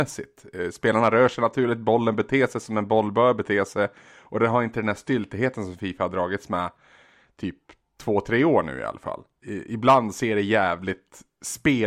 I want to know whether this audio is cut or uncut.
uncut